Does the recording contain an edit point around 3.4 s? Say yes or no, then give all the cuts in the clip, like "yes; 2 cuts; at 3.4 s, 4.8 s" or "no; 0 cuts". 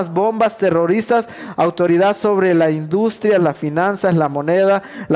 yes; 1 cut; at 3.4 s